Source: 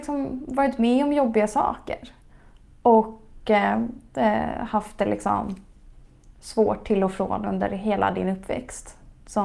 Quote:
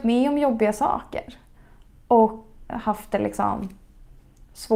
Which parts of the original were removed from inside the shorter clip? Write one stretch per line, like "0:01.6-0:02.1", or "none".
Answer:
0:03.4-0:04.6